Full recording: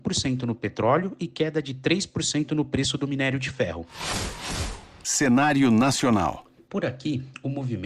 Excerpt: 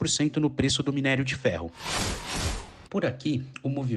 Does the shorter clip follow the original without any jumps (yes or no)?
no